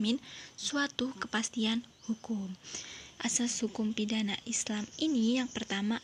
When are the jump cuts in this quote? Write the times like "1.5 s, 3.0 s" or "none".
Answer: 3.2 s